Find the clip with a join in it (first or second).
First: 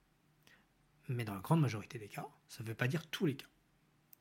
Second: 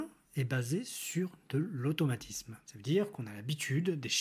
second